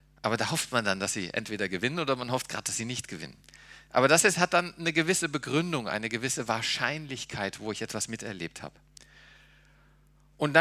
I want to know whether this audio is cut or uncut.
uncut